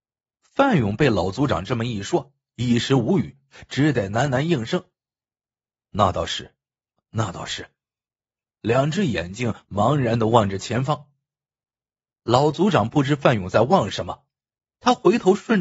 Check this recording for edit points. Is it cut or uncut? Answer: uncut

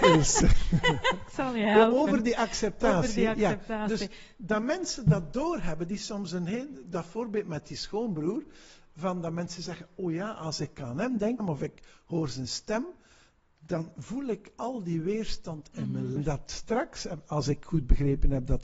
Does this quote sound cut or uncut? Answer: cut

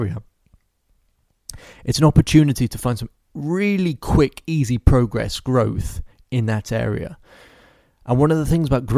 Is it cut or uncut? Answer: uncut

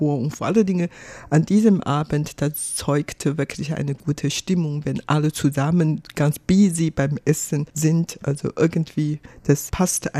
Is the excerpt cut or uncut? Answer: uncut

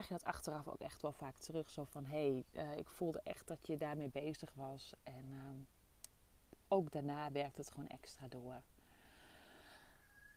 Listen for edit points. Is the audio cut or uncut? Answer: uncut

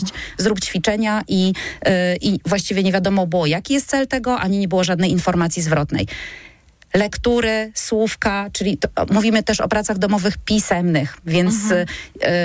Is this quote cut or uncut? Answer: uncut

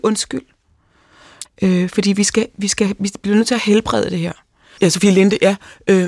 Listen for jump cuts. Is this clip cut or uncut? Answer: cut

